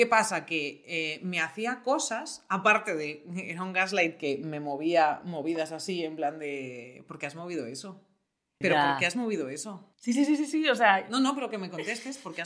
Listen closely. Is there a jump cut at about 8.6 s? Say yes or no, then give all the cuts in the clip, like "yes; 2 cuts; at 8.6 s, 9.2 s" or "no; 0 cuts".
yes; 2 cuts; at 8.6 s, 9.9 s